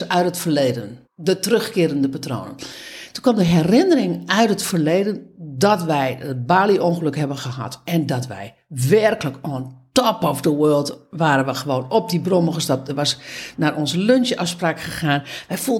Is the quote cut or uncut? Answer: cut